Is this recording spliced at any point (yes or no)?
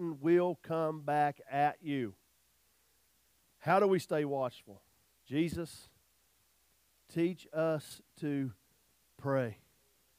yes